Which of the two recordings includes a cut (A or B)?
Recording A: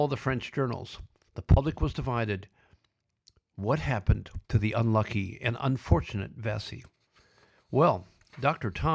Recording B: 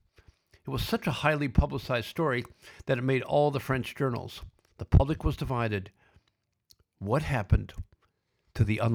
A